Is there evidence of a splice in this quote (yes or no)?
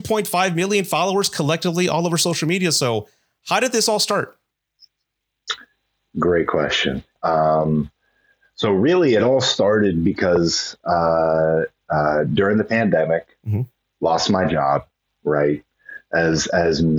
yes